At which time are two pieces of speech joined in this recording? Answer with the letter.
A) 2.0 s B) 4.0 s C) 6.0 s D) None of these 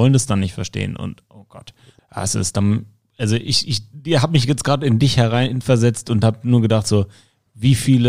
A